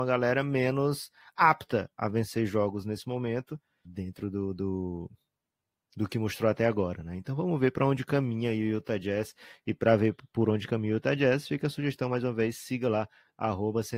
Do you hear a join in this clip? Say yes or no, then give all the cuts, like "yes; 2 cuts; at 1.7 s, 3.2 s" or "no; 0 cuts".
yes; 1 cut; at 3.8 s